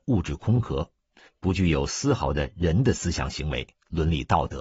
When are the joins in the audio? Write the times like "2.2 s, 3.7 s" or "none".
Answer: none